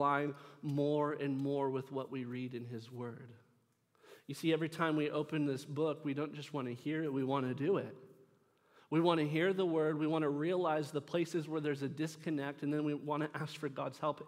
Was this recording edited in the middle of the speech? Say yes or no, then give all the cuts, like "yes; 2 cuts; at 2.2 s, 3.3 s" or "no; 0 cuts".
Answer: no; 0 cuts